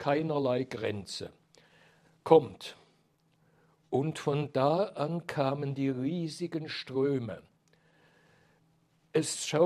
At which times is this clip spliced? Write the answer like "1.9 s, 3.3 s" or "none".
none